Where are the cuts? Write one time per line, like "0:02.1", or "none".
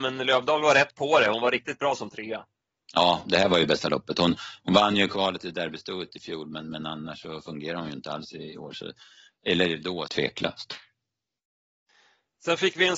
0:10.1